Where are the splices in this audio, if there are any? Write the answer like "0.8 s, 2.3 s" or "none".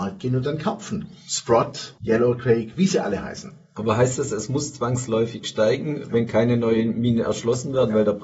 2.0 s